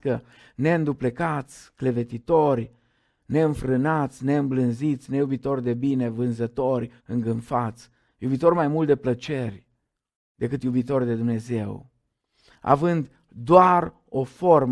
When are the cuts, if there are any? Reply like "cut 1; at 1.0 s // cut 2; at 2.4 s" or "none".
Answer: cut 1; at 7.0 s